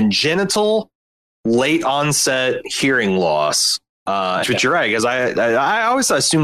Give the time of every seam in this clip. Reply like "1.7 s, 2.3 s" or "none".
4.4 s

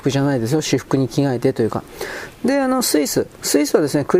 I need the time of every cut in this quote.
2.3 s

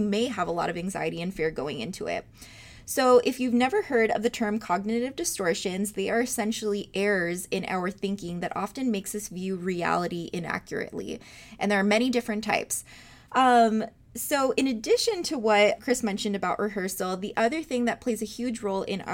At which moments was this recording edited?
13.3 s, 15.8 s

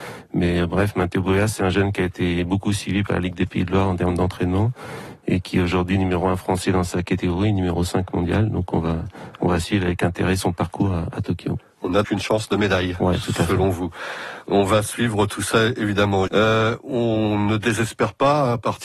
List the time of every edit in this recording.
12.0 s, 16.3 s

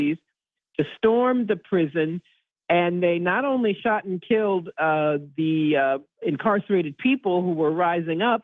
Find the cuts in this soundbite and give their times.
6.2 s

